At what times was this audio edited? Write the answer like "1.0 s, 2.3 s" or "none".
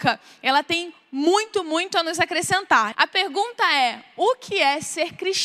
2.9 s